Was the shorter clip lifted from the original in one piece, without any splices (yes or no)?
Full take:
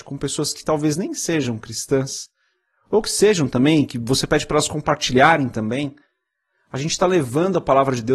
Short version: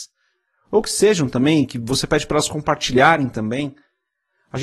yes